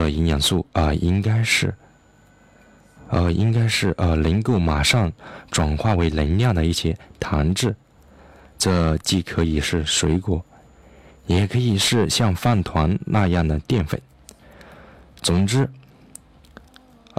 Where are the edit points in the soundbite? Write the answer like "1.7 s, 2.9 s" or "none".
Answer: none